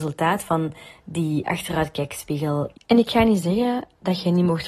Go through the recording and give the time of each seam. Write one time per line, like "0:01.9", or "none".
0:02.7